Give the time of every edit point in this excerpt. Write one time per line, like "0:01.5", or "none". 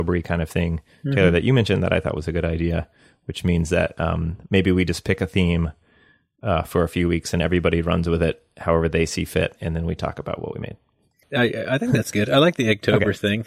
0:11.2